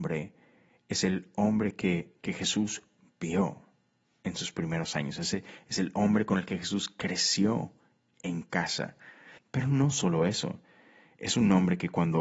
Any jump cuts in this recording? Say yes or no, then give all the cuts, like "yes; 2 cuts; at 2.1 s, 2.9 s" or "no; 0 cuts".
yes; 1 cut; at 9.4 s